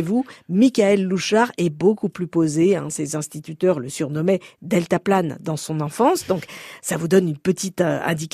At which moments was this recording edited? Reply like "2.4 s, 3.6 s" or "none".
none